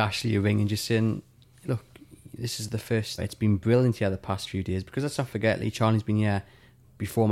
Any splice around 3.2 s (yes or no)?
yes